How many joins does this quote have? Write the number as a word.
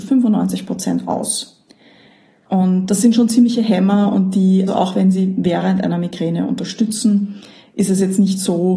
two